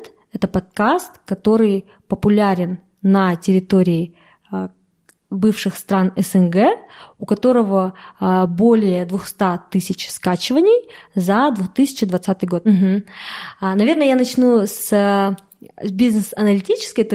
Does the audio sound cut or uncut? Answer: cut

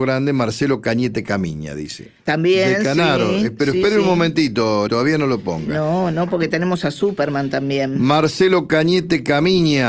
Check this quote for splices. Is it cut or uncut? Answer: cut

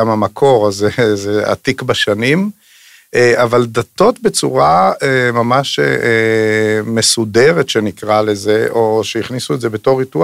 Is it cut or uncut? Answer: uncut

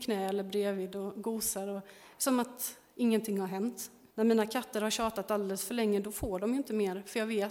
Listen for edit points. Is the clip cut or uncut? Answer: cut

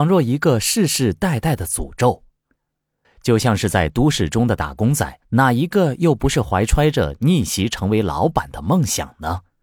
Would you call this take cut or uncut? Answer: cut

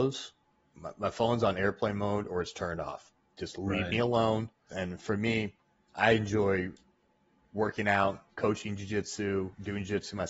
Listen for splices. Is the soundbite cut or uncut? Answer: cut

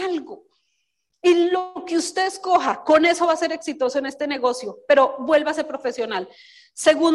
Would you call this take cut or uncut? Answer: uncut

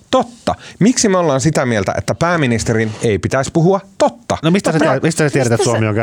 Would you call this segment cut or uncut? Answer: cut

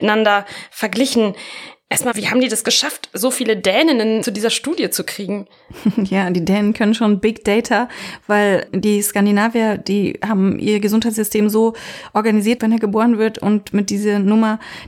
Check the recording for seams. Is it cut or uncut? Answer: cut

